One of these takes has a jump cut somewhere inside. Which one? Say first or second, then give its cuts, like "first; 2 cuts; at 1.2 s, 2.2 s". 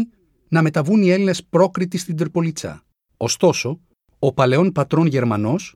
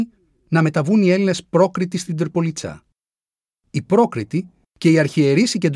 first; 1 cut; at 3.1 s